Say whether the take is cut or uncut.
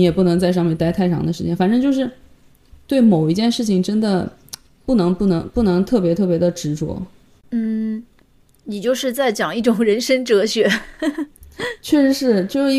uncut